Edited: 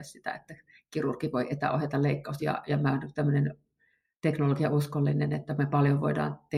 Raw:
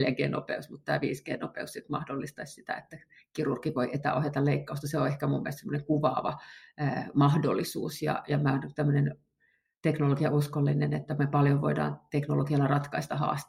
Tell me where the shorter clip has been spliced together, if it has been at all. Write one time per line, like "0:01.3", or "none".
0:02.4

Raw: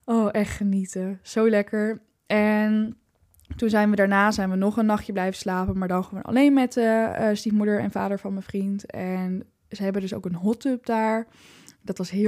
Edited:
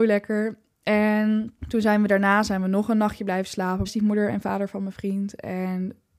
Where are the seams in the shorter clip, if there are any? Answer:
0:01.6
0:03.8

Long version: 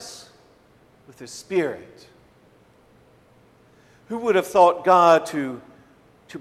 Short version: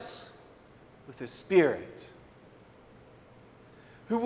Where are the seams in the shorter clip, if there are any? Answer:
none

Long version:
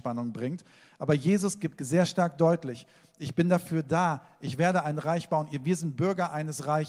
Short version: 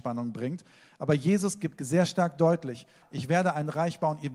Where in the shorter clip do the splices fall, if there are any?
0:03.0

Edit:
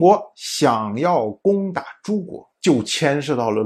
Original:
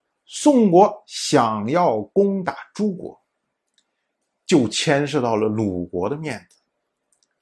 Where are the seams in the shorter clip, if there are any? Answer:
0:02.5

